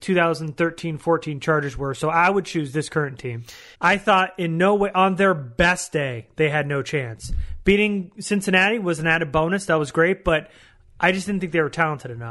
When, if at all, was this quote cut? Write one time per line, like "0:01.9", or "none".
0:03.7